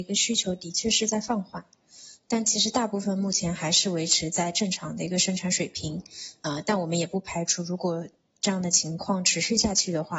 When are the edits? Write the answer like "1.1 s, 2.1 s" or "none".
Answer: 2.2 s